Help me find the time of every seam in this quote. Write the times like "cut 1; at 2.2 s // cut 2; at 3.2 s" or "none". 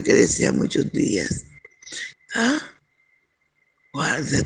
cut 1; at 2.1 s